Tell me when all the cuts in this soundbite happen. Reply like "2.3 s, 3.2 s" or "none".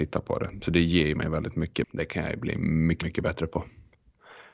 1.8 s, 3.0 s